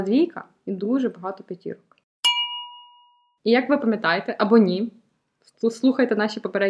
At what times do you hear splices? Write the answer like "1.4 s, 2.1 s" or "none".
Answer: 3.4 s